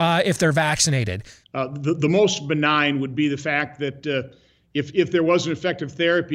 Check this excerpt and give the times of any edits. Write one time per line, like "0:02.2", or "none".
0:01.4